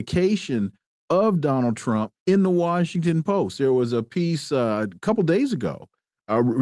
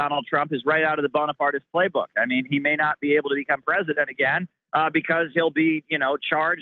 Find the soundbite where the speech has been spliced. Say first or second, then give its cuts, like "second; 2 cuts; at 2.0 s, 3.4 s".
first; 1 cut; at 2.2 s